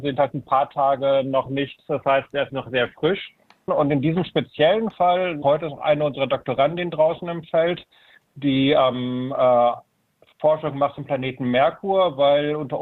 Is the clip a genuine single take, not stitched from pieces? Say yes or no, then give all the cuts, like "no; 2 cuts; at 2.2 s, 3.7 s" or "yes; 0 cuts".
no; 2 cuts; at 3.7 s, 5.4 s